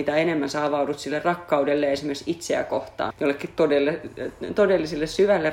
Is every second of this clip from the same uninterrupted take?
no; 1 cut; at 3.1 s

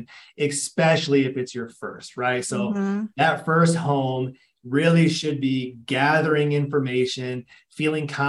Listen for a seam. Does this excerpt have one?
no; 0 cuts

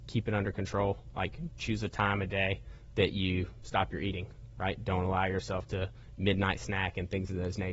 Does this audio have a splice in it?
no; 0 cuts

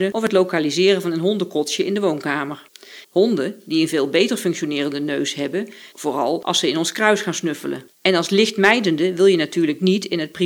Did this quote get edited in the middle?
yes; 3 cuts; at 3.0 s, 5.9 s, 7.9 s

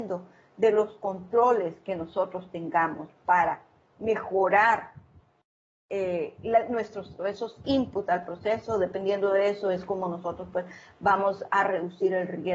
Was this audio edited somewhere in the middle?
yes; 1 cut; at 7.2 s

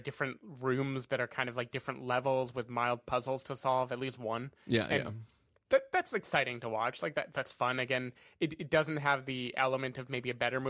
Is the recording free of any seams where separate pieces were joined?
yes; 0 cuts

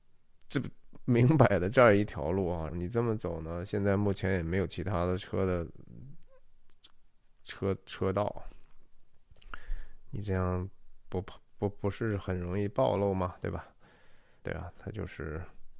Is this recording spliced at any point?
yes; 2 cuts; at 2.7 s, 14.4 s

